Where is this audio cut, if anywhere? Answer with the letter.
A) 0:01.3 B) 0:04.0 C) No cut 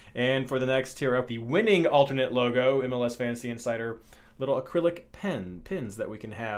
A